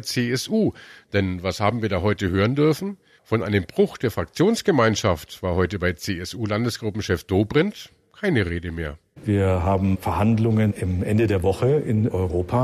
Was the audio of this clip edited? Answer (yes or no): yes